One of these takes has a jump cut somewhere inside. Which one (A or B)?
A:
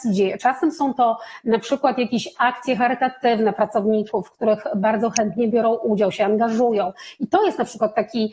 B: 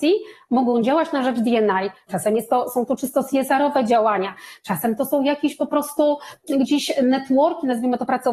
B